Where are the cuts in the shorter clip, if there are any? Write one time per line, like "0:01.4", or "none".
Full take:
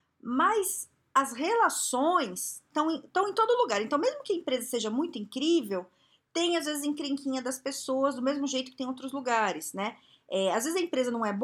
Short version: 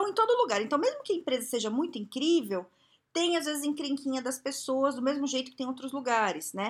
none